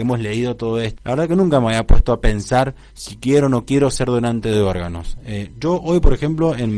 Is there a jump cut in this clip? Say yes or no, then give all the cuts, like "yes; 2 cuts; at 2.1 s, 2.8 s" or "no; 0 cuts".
yes; 1 cut; at 1.0 s